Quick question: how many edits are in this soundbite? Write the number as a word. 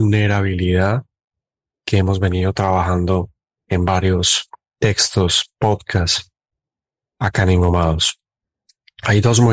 zero